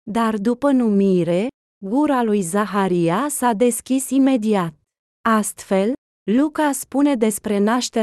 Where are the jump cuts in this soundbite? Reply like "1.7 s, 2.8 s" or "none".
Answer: 5.1 s